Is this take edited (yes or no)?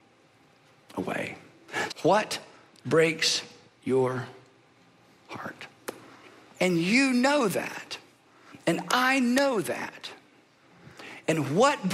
yes